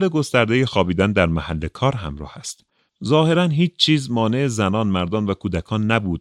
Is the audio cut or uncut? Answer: cut